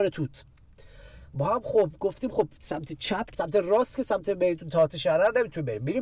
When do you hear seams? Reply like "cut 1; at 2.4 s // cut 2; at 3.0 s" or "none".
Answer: cut 1; at 3.3 s